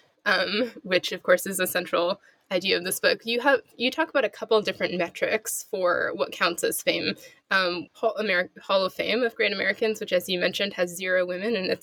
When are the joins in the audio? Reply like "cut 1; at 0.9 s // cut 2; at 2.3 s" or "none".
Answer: cut 1; at 7.9 s

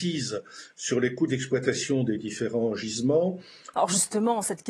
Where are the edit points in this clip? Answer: cut 1; at 3.7 s

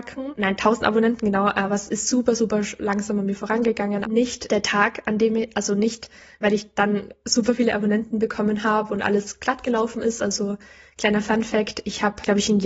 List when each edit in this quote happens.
cut 1; at 4.0 s

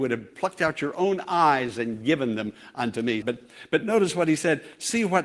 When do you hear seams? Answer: cut 1; at 3.2 s

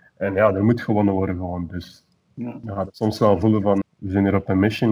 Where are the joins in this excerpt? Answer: cut 1; at 3.8 s

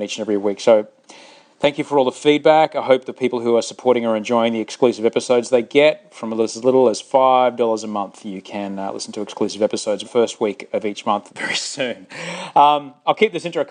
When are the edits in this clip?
cut 1; at 10.0 s // cut 2; at 11.3 s

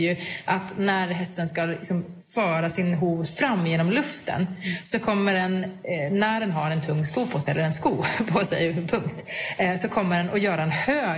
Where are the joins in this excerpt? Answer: none

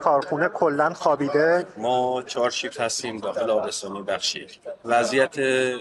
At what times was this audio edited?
cut 1; at 4.8 s

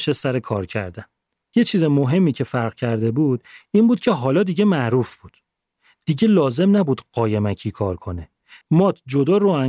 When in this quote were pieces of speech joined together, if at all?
cut 1; at 8.6 s

